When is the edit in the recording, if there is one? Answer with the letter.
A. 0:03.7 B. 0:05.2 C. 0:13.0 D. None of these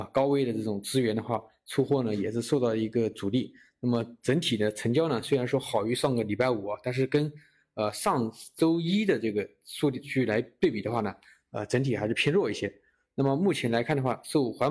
D